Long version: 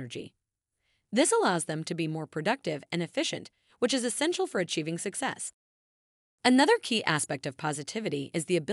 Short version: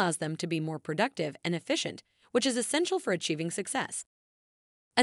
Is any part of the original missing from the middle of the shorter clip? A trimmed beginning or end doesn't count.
no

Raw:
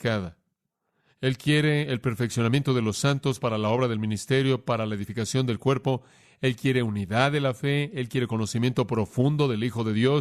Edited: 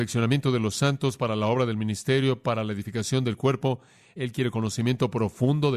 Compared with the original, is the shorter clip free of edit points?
no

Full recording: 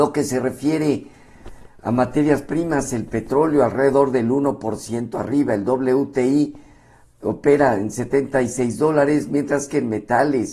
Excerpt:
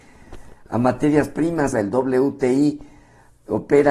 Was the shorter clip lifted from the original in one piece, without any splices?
no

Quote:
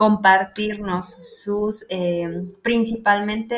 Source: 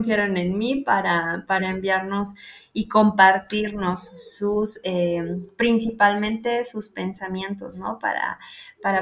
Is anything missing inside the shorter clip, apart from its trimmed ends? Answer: no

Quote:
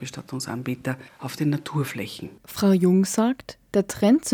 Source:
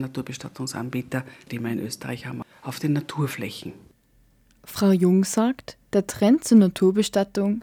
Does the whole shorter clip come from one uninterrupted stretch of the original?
no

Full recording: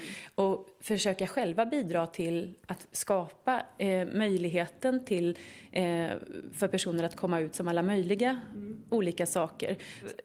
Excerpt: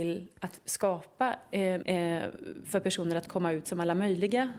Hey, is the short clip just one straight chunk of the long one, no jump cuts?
no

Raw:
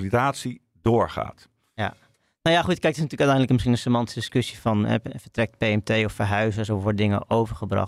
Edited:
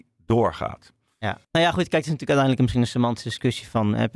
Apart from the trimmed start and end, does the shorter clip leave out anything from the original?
yes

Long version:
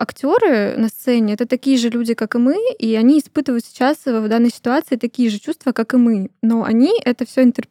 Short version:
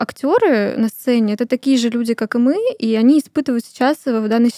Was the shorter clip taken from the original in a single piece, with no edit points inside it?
yes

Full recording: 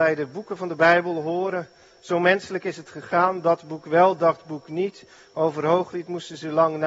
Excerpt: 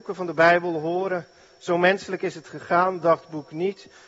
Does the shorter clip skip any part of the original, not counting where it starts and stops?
yes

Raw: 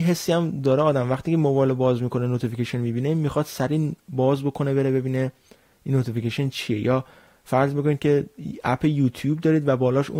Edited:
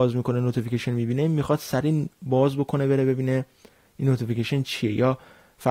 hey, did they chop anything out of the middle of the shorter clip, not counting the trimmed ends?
no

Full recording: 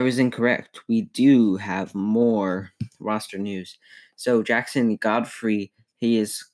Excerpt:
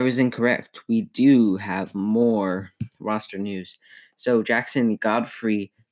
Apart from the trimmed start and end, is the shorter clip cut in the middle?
no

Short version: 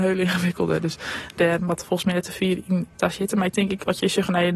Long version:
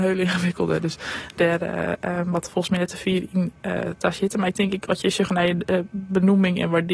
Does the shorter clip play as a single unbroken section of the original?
no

